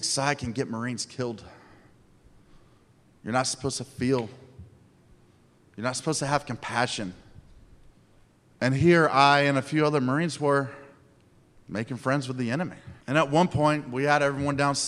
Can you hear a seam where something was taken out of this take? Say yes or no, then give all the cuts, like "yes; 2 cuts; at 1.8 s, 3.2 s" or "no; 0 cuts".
yes; 1 cut; at 13.0 s